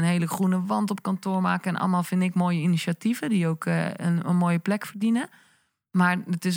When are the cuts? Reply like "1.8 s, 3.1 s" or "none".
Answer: none